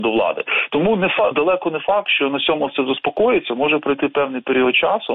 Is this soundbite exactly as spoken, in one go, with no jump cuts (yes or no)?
no